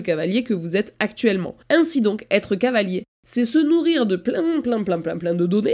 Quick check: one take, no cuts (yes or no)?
yes